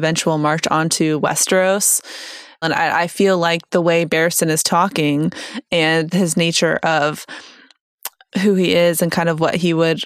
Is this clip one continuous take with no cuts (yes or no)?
no